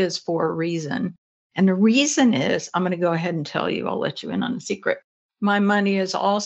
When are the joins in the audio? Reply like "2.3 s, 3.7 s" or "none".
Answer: 1.4 s, 5.3 s